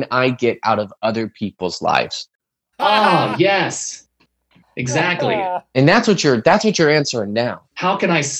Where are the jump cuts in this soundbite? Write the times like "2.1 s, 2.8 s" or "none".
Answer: 2.7 s

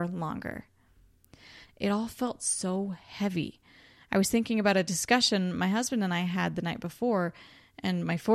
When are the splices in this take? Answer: 1.6 s

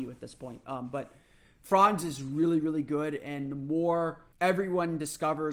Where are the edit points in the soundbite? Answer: 4.3 s

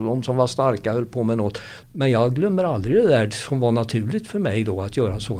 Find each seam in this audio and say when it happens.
1.8 s

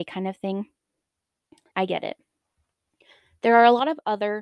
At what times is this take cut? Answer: 1.7 s

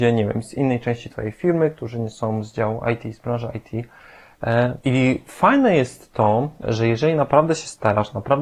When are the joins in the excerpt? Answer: 4.8 s, 6.6 s

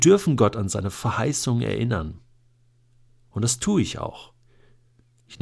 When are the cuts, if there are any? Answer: none

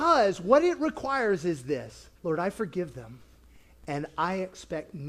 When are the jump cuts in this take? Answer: 2.2 s

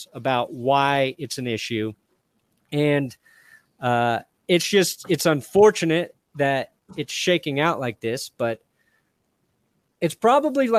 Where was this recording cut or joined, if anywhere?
none

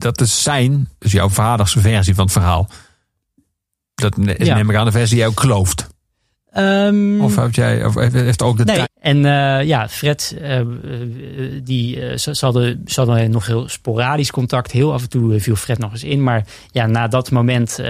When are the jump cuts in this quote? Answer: 8.8 s

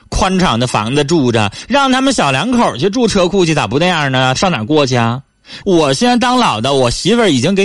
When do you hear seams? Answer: 4.4 s, 5.6 s

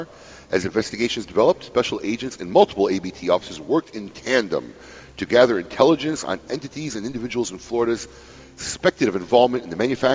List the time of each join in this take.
none

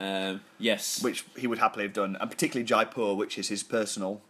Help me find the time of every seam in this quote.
none

